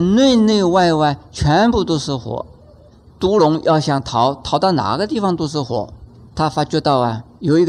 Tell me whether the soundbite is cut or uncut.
uncut